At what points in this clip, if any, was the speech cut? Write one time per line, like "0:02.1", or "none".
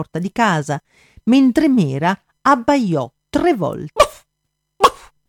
0:03.9